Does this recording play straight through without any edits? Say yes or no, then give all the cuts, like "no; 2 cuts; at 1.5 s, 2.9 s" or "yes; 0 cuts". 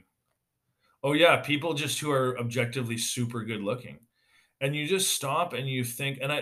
yes; 0 cuts